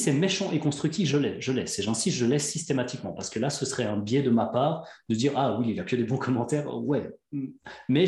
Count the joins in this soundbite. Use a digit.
0